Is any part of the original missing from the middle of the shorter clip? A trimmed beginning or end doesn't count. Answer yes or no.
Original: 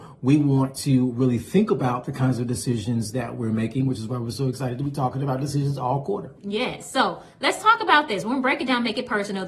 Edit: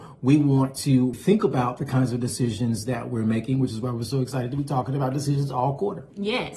yes